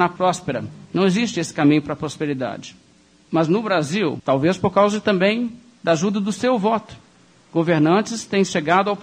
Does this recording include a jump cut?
yes; 1 cut; at 4.2 s

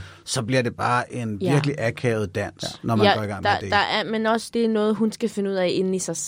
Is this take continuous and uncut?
no; 1 cut; at 4.5 s

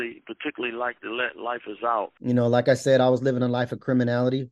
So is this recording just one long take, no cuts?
no; 1 cut; at 2.2 s

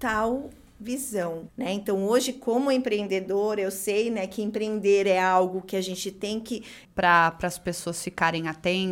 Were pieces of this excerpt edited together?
yes; 2 cuts; at 1.5 s, 6.9 s

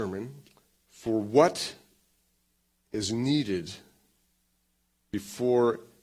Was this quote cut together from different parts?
no; 0 cuts

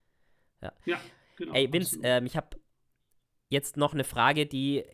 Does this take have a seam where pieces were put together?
no; 0 cuts

